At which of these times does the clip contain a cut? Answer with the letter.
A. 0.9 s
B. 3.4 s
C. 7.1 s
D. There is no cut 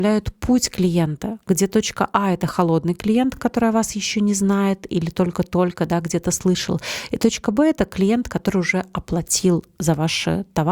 D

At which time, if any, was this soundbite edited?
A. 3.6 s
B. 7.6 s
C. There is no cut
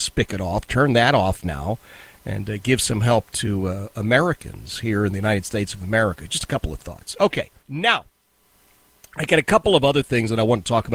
B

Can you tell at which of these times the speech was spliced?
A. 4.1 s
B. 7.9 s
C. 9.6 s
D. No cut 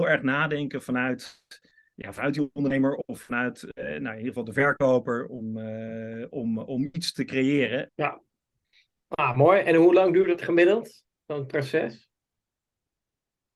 B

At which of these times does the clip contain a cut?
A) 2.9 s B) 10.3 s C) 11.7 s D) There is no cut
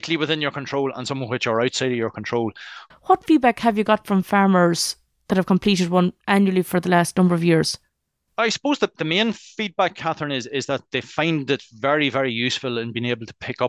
A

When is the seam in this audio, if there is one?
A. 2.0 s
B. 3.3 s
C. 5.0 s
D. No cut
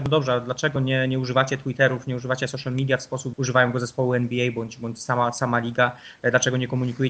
B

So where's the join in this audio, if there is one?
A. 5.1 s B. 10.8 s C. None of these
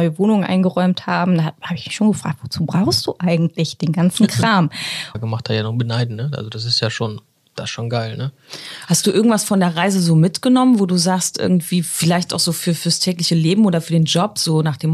A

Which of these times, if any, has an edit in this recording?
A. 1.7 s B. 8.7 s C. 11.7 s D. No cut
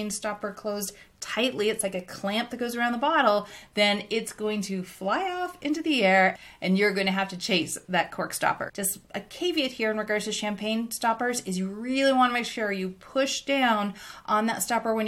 B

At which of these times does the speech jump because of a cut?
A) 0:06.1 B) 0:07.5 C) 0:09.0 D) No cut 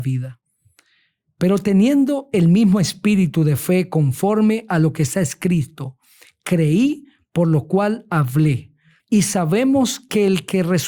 C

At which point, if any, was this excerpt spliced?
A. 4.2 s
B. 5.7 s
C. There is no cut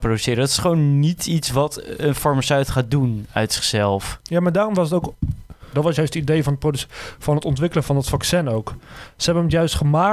B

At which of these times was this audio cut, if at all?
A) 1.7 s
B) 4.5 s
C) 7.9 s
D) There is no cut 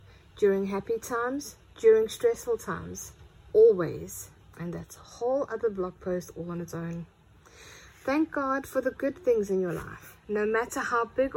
B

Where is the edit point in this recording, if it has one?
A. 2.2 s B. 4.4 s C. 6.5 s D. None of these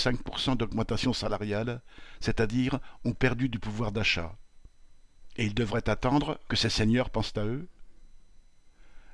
C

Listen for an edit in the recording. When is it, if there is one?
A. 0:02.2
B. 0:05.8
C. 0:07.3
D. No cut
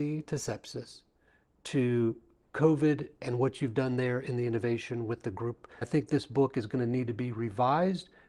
B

